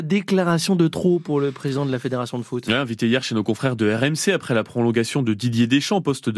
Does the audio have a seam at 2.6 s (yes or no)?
no